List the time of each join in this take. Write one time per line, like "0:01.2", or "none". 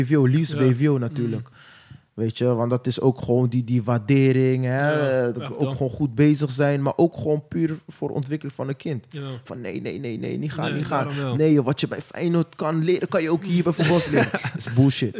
0:09.5